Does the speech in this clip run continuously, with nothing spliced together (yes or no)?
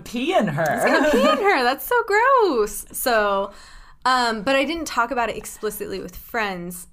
yes